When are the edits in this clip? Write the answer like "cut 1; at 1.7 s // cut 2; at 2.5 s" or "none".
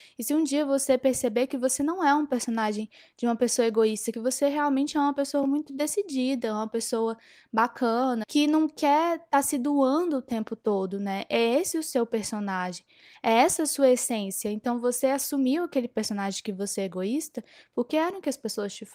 none